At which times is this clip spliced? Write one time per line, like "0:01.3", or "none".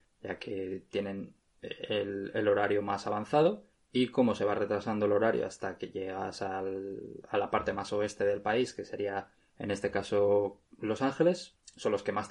none